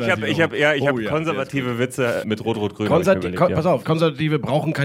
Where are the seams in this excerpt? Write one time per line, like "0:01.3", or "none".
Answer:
0:02.2
0:03.8